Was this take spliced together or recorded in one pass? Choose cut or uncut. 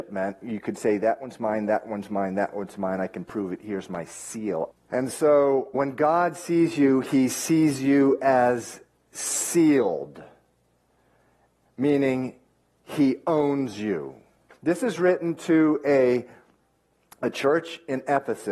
cut